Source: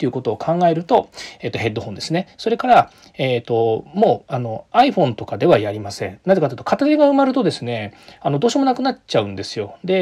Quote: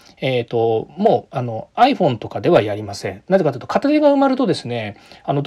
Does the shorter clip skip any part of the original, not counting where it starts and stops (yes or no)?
no